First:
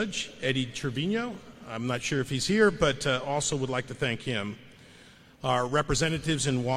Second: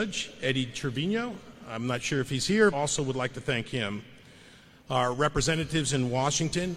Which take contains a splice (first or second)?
second